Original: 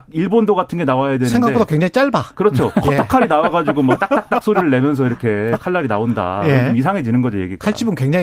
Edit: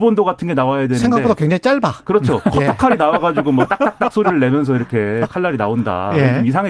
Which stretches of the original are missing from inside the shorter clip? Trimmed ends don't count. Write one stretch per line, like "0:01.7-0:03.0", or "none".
none